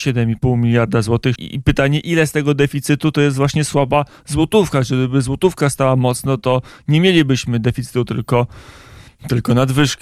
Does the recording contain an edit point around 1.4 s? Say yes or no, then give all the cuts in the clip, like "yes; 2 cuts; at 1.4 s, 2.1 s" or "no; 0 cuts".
yes; 1 cut; at 1.4 s